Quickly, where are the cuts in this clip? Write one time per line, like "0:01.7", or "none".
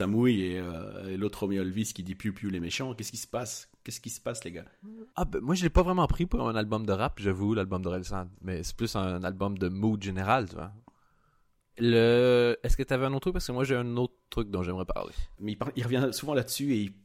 0:05.1
0:11.7
0:15.4

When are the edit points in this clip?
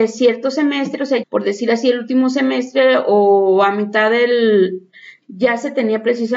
0:01.2
0:05.2

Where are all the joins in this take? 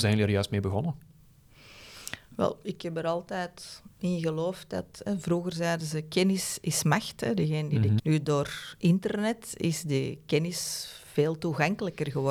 0:08.0

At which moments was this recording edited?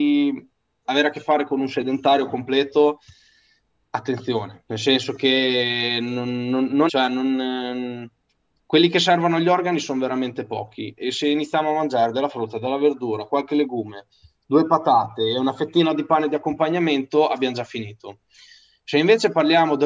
0:06.9

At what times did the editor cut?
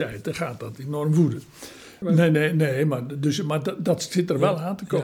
0:02.0

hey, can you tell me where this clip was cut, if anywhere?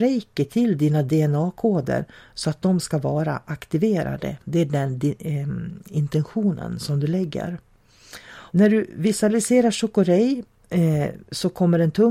0:08.5

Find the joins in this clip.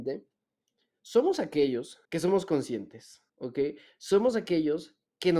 0:02.1
0:03.3

